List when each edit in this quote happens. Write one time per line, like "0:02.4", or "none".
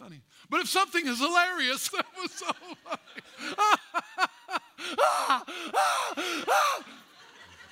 0:01.9